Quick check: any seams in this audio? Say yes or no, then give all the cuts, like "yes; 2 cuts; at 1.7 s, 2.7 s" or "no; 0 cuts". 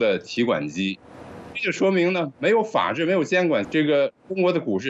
yes; 2 cuts; at 1.5 s, 3.6 s